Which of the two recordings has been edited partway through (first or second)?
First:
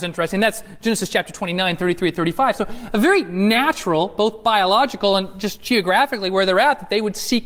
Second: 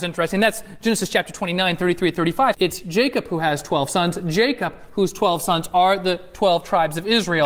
second